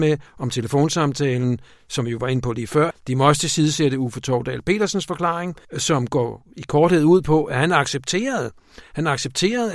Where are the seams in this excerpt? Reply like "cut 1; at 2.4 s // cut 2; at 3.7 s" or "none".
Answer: cut 1; at 2.9 s // cut 2; at 5.6 s